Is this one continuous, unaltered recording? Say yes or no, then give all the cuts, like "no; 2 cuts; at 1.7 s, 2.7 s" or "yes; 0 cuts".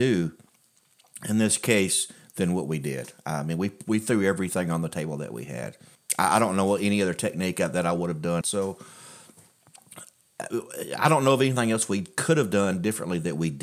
no; 1 cut; at 8.4 s